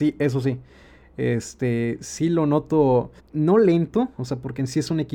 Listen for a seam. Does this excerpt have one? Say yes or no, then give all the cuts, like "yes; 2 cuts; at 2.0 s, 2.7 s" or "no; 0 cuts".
yes; 1 cut; at 3.2 s